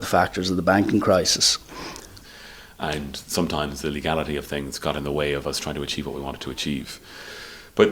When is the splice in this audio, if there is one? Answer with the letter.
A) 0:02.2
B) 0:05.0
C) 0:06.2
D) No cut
A